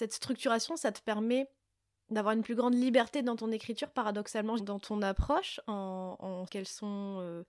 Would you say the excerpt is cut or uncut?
cut